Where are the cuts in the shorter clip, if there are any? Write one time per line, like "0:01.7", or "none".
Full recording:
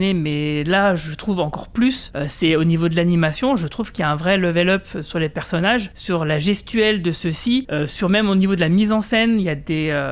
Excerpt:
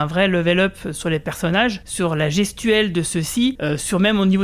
none